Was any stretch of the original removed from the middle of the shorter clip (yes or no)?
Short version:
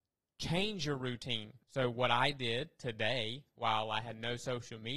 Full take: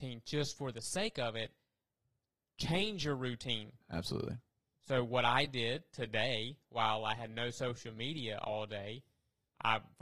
yes